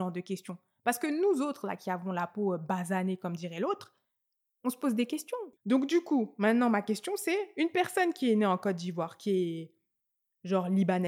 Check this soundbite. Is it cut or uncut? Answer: cut